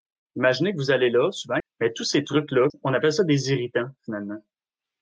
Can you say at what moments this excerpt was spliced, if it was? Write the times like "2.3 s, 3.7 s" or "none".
1.6 s, 2.7 s

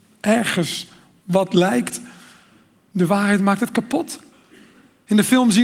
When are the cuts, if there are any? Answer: none

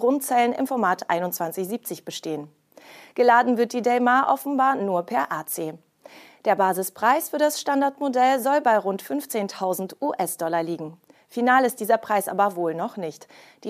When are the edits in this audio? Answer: none

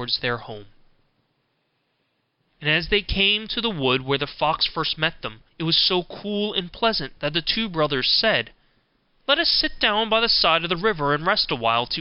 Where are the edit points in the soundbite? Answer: 5.5 s

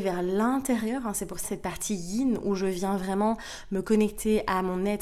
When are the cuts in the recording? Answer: 1.4 s

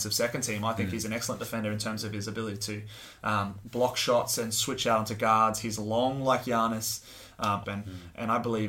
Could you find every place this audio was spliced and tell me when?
7.6 s

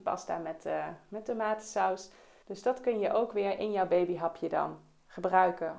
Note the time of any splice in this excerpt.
2.4 s

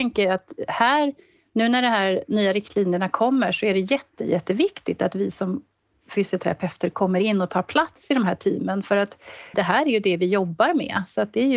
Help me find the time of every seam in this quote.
9.5 s

